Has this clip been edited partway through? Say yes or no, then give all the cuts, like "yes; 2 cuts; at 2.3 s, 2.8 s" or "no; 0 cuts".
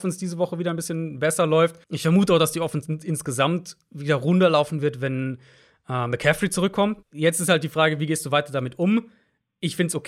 yes; 2 cuts; at 1.8 s, 7.0 s